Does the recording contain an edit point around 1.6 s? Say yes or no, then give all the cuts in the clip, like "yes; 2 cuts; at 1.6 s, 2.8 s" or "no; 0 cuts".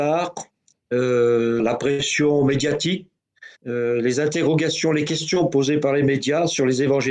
yes; 2 cuts; at 1.6 s, 3.6 s